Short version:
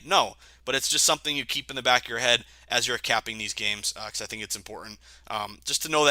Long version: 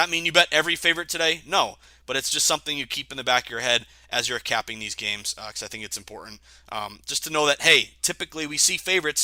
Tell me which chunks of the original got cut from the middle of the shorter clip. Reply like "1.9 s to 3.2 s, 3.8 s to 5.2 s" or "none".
none